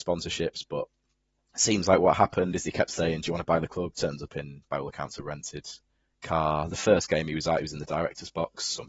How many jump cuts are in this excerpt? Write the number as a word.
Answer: one